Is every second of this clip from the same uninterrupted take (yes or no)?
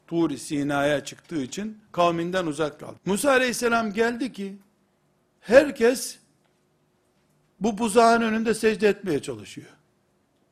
no